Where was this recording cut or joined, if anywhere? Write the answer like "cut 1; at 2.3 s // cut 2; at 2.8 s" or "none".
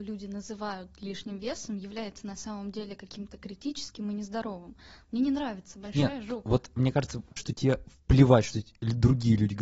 cut 1; at 5.0 s // cut 2; at 7.4 s